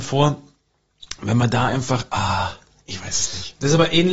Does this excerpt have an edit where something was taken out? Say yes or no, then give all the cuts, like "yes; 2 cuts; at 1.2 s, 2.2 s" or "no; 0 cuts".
no; 0 cuts